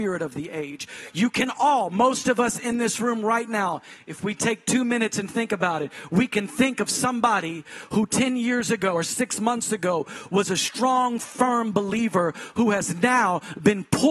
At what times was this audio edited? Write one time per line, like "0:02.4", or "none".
0:08.9